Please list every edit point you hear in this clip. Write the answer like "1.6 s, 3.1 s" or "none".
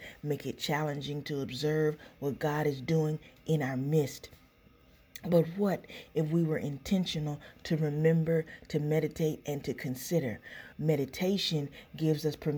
10.7 s